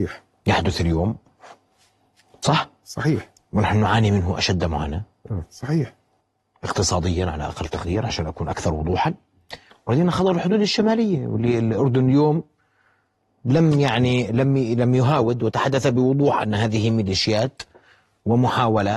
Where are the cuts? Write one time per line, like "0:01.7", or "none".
none